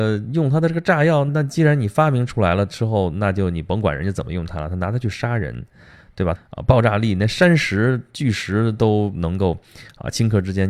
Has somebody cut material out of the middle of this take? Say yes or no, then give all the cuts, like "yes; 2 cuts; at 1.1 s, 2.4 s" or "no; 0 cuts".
yes; 2 cuts; at 1.3 s, 6.3 s